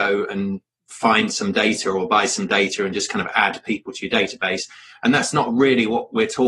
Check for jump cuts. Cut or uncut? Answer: uncut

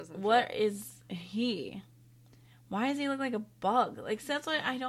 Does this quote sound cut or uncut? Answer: uncut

